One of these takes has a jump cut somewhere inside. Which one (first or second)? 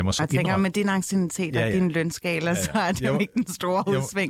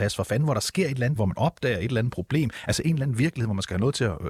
second